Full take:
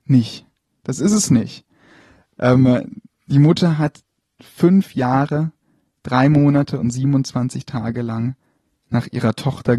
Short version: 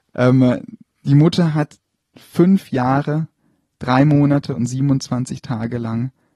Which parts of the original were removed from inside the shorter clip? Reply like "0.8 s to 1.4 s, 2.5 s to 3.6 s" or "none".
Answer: none

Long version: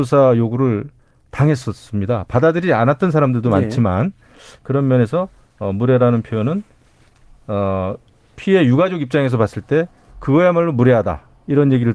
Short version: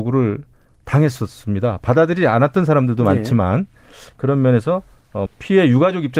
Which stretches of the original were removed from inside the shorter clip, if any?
5.7 s to 8.2 s

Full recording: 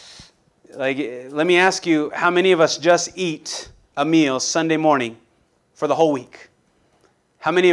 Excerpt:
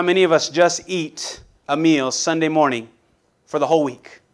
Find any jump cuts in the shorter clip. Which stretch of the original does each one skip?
none

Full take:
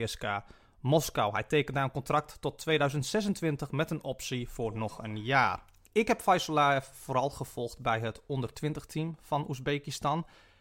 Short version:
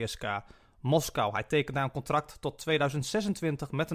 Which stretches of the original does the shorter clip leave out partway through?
none

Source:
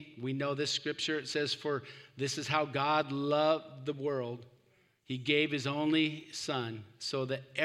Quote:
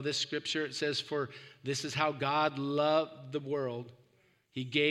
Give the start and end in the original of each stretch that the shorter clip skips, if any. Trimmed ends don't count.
none

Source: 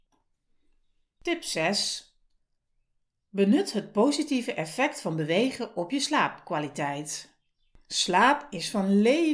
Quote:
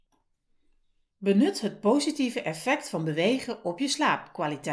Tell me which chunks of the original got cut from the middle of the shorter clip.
1.1 s to 3.2 s

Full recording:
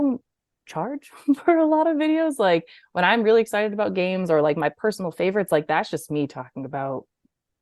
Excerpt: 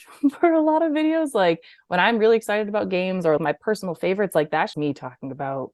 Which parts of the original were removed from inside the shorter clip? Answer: 4.4 s to 4.5 s, 5.9 s to 6.1 s

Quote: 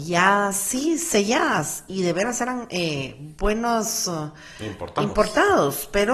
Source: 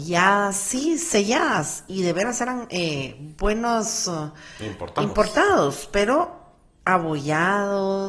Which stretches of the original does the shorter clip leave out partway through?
none

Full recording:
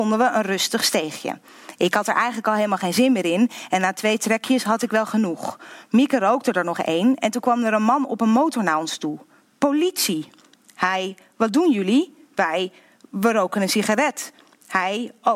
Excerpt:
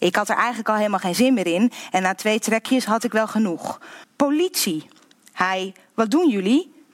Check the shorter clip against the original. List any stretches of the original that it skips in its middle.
5.8 s to 9.5 s

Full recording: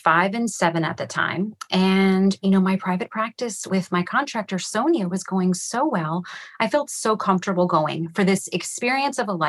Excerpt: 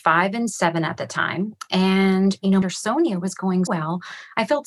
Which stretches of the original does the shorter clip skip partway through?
2.6 s to 4.5 s, 5.6 s to 5.9 s

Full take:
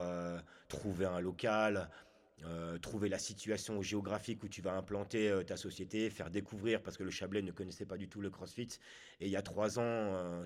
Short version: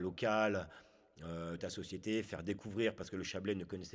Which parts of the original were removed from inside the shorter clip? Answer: 2.8 s to 5.4 s

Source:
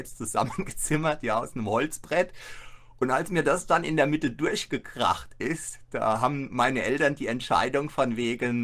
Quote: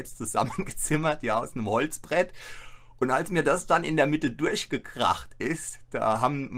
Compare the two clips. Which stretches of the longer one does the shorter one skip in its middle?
none

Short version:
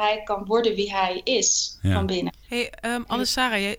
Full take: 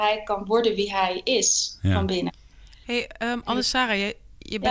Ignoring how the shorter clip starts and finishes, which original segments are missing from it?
2.4 s to 2.8 s

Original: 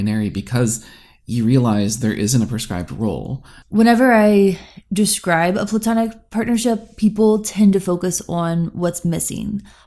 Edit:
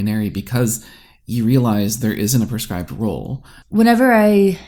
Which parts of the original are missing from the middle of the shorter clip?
none

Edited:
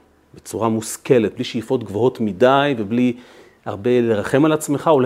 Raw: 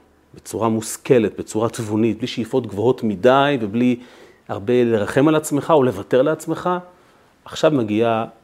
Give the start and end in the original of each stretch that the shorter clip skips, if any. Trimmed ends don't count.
1.4 s to 2.2 s

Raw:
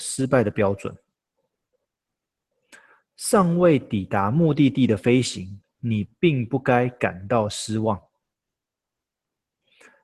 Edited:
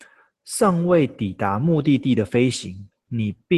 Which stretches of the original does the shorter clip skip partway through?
none

